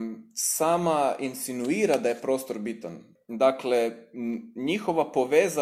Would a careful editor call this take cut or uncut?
cut